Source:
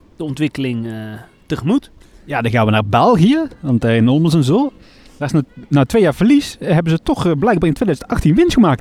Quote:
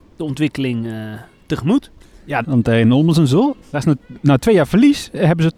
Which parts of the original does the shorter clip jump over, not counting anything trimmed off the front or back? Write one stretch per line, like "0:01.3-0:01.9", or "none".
0:02.4-0:03.6
0:04.8-0:05.1